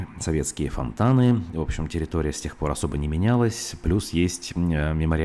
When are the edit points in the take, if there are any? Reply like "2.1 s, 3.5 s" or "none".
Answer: none